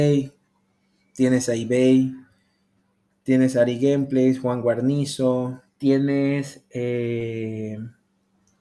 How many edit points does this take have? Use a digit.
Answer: 1